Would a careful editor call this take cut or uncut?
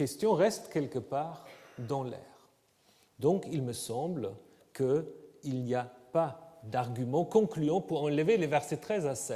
uncut